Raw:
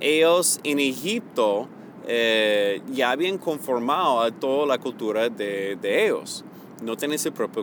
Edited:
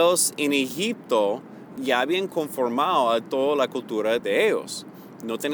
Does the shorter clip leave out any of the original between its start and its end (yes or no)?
yes